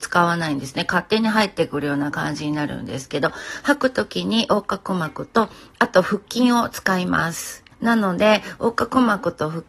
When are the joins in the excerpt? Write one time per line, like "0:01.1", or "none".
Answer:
0:07.7